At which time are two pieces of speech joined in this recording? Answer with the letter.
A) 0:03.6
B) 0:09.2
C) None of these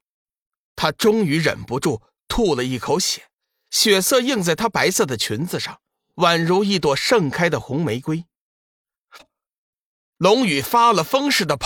B